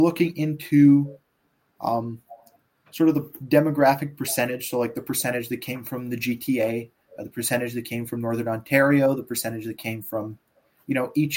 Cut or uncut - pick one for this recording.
uncut